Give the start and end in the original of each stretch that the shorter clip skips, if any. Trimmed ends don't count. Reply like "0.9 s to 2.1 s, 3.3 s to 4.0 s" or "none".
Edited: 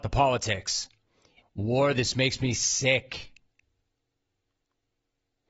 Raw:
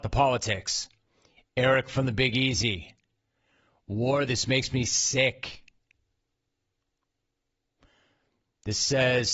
1.4 s to 3.7 s